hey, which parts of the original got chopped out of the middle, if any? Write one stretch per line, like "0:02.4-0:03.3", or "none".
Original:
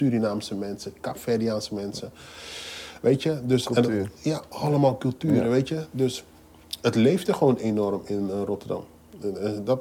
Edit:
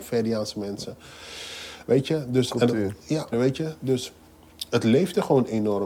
0:04.5-0:05.4